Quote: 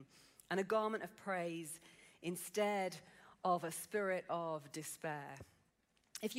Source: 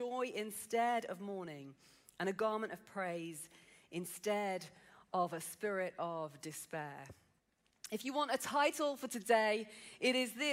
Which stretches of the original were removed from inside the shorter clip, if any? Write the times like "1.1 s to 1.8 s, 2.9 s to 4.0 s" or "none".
none